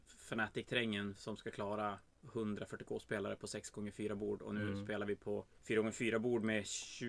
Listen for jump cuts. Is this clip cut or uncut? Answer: uncut